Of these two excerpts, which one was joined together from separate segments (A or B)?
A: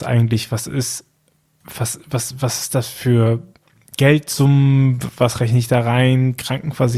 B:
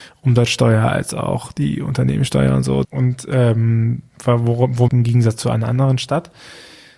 B